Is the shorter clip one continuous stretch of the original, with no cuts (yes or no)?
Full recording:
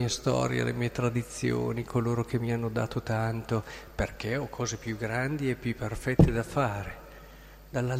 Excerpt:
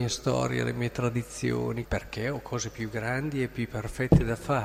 no